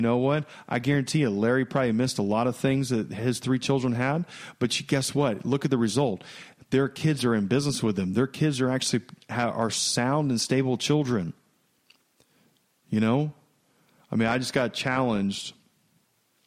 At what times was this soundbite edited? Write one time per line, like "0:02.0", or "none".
none